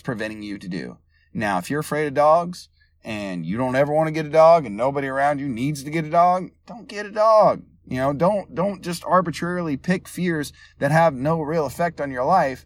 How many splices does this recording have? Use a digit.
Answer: 0